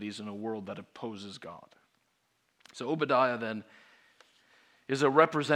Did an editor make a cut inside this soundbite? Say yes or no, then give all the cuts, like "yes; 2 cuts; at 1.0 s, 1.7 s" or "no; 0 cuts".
no; 0 cuts